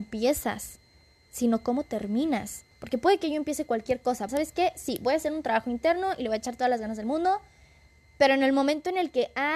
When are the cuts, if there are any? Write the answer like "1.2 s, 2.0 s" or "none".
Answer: 2.7 s, 4.3 s